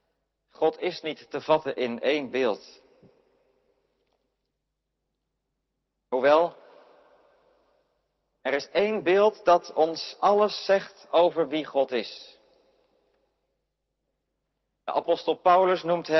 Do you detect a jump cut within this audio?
no; 0 cuts

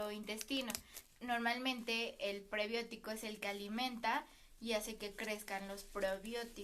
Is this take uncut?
no; 1 cut; at 1.0 s

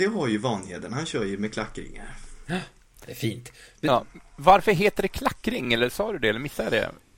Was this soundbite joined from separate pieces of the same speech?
no; 0 cuts

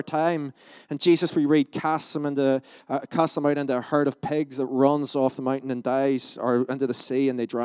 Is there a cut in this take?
no; 0 cuts

